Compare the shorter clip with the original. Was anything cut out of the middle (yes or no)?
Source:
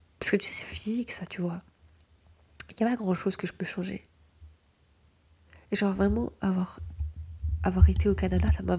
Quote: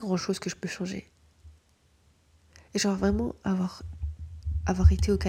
no